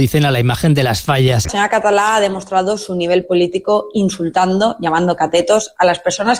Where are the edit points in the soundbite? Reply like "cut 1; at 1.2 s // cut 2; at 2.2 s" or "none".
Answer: cut 1; at 1.4 s